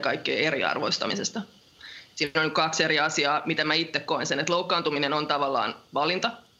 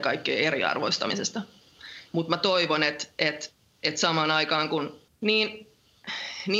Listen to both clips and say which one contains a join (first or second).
second